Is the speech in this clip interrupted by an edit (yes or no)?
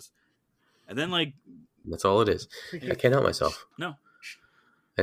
yes